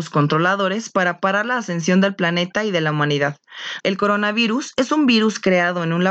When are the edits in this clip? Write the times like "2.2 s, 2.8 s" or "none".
3.8 s